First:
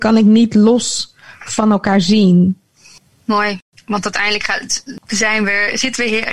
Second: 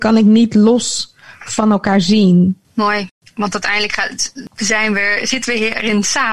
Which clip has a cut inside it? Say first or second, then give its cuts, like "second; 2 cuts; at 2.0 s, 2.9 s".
second; 1 cut; at 2.6 s